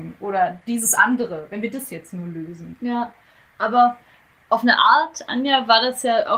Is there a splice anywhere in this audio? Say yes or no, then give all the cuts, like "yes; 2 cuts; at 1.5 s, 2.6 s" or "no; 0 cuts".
no; 0 cuts